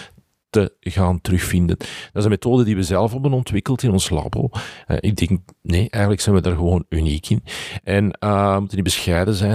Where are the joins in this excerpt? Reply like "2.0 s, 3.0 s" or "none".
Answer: 4.8 s